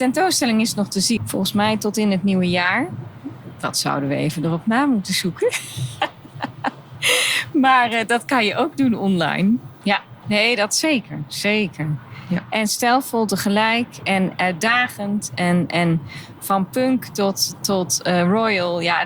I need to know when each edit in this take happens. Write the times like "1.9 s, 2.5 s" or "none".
1.2 s, 9.8 s